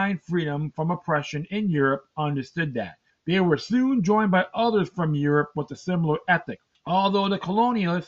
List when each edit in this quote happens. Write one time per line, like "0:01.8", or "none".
0:03.1
0:06.7